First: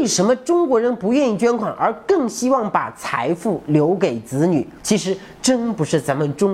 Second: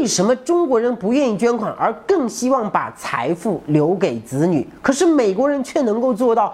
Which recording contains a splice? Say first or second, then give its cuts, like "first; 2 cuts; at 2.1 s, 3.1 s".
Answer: first; 1 cut; at 4.8 s